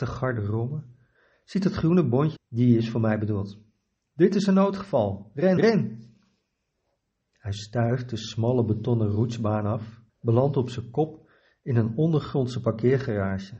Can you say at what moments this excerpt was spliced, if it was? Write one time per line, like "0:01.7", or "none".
0:02.4
0:05.6
0:10.1